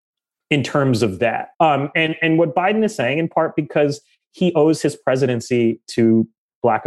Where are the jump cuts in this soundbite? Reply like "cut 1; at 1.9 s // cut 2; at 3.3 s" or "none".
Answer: cut 1; at 1.5 s